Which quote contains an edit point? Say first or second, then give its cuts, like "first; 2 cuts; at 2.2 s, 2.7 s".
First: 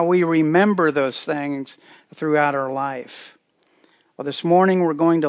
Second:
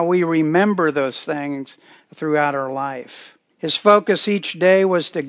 second; 1 cut; at 3.5 s